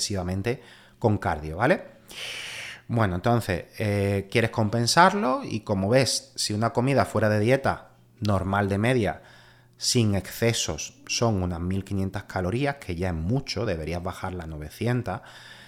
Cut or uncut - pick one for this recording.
uncut